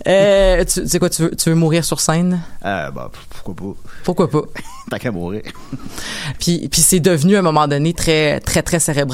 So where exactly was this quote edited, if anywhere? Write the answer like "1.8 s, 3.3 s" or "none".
6.4 s, 7.9 s